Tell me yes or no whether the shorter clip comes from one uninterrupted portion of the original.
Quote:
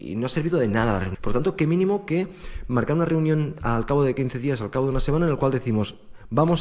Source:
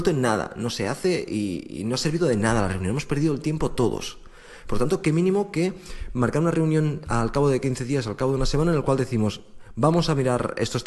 no